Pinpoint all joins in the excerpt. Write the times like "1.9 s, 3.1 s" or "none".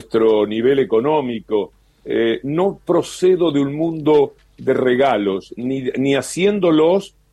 none

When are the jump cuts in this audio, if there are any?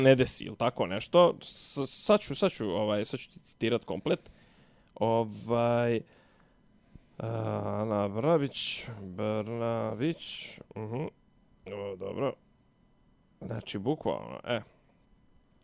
none

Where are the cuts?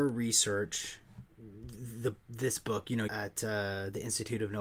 1.2 s, 3.1 s

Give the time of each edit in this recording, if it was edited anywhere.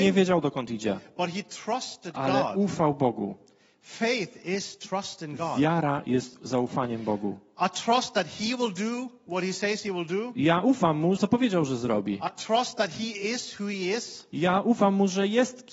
11.2 s

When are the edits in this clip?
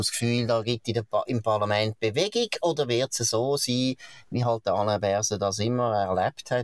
none

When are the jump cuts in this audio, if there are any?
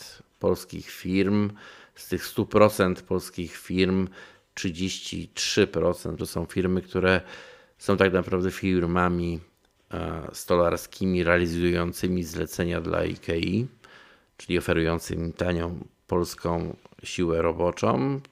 6.2 s

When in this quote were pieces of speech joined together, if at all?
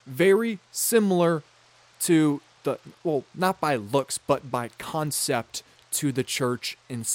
none

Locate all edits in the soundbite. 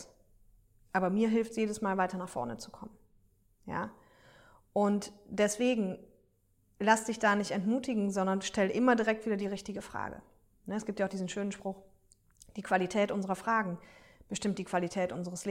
none

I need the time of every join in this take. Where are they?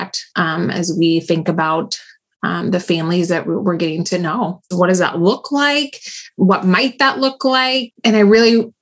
4.7 s, 7.9 s

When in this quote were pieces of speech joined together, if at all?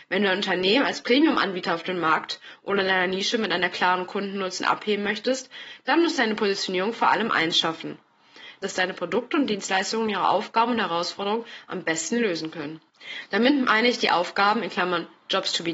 8.6 s

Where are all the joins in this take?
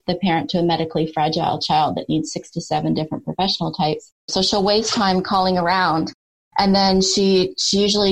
4.3 s

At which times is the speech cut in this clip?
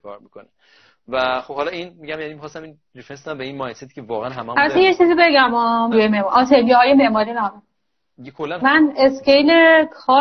5.9 s, 8.6 s

